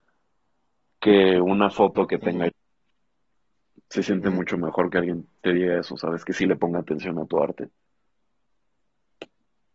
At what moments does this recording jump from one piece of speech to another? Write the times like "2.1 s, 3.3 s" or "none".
2.5 s